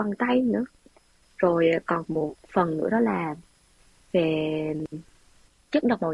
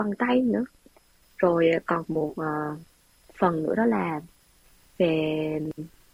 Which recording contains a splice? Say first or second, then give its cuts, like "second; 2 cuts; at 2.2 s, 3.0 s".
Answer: first; 1 cut; at 2.3 s